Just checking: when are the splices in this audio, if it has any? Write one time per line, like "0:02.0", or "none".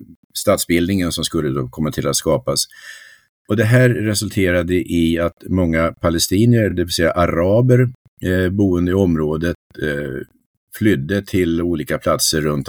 none